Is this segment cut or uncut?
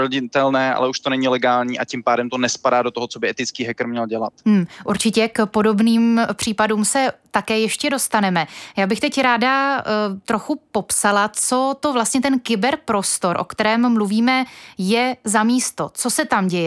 uncut